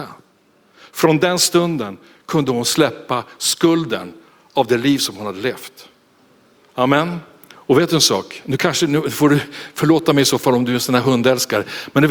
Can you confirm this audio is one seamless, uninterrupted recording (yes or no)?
no